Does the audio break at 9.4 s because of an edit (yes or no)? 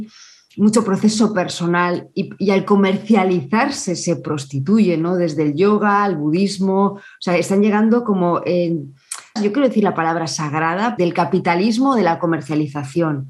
yes